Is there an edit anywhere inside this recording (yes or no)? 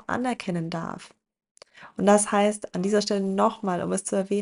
no